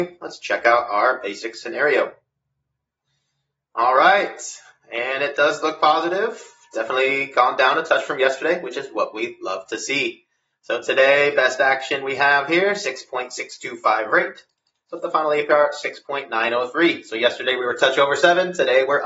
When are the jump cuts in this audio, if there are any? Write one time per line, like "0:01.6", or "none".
0:14.9